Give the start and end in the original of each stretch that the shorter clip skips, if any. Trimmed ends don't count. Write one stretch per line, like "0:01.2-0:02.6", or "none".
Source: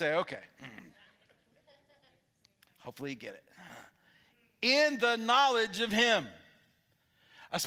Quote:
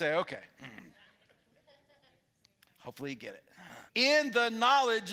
0:03.9-0:04.5